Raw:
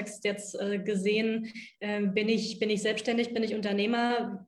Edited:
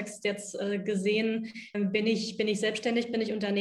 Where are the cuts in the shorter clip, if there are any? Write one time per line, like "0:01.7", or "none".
0:01.7